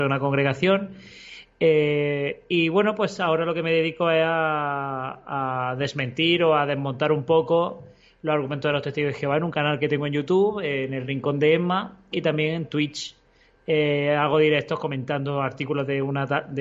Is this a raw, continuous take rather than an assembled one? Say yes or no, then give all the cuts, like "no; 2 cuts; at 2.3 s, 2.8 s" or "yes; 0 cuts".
yes; 0 cuts